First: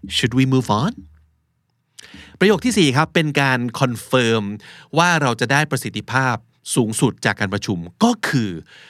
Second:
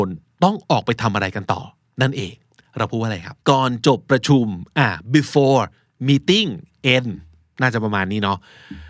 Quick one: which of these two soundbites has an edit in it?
second; 1 cut; at 3.4 s

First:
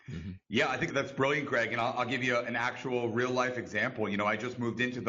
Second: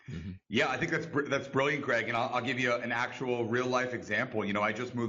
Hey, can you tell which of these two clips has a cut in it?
first; 1 cut; at 0.9 s

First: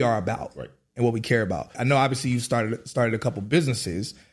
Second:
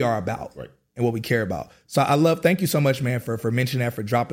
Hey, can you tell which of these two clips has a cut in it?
first; 1 cut; at 1.7 s

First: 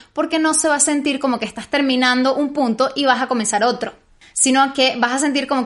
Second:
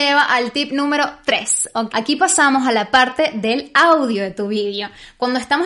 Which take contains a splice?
second; 1 cut; at 1.9 s

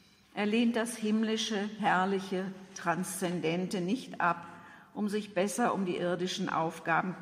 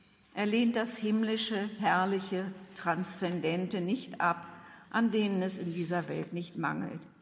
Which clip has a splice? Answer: second; 1 cut; at 4.8 s

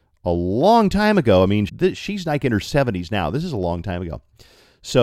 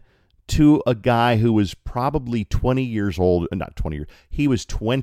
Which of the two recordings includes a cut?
first; 1 cut; at 1.7 s

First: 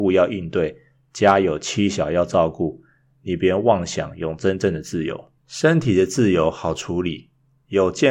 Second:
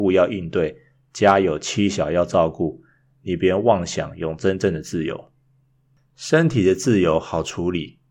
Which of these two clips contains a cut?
first; 1 cut; at 5.4 s

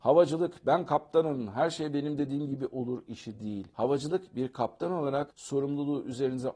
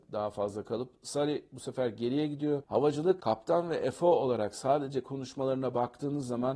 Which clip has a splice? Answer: second; 1 cut; at 2.6 s

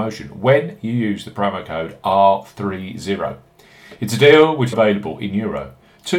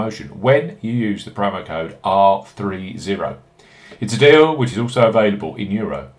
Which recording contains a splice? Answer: first; 1 cut; at 4.7 s

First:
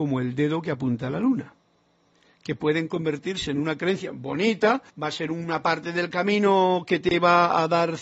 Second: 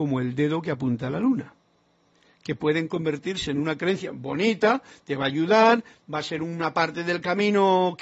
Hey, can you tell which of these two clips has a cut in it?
first; 1 cut; at 4.9 s

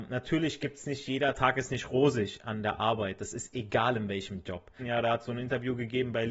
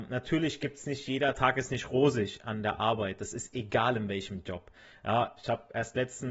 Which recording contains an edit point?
first; 1 cut; at 4.8 s

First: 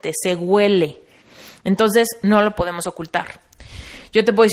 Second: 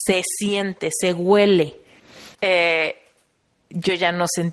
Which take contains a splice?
second; 1 cut; at 2.4 s

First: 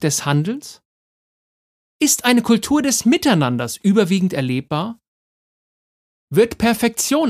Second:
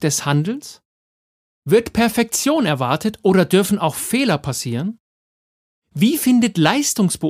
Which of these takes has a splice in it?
second; 1 cut; at 1.5 s

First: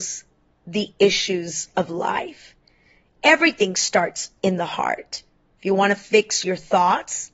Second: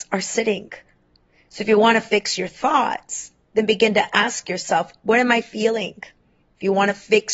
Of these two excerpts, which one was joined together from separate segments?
second; 1 cut; at 6.4 s

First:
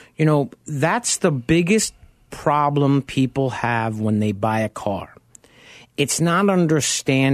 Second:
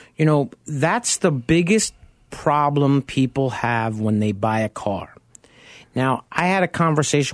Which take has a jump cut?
second; 1 cut; at 5.8 s

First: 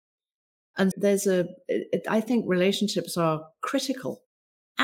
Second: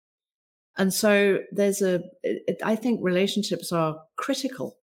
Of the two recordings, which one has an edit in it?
first; 1 cut; at 0.9 s

